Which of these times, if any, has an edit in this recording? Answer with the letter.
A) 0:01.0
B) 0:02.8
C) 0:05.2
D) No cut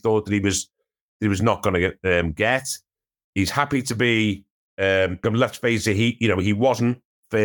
C